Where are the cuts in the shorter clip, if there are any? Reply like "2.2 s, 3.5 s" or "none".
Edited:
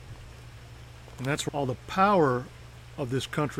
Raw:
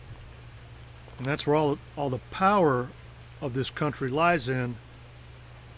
1.5 s